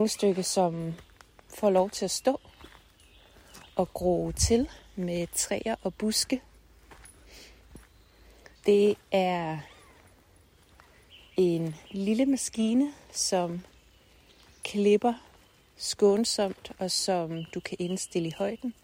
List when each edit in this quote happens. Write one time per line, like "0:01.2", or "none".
0:08.6